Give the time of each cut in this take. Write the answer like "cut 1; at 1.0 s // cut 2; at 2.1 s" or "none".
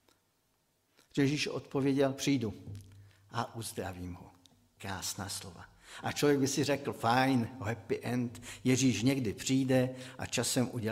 none